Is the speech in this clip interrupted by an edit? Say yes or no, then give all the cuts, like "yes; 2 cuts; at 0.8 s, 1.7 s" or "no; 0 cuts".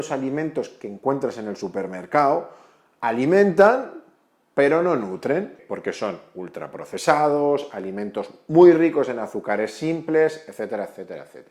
no; 0 cuts